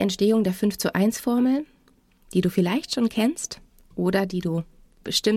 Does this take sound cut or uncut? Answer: uncut